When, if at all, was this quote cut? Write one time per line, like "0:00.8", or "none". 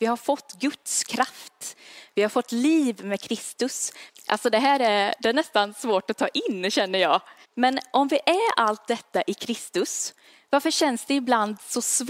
0:04.1
0:07.4

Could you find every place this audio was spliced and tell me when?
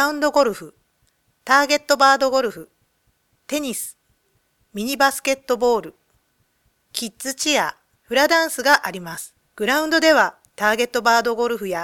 0:08.0
0:09.4

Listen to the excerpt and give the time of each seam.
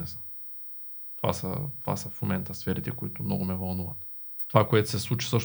0:04.5

